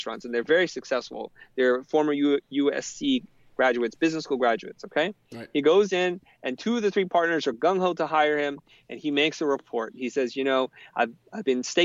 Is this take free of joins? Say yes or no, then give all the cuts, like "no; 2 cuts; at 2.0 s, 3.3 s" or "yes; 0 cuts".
yes; 0 cuts